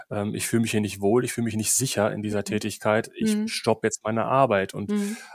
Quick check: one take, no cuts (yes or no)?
yes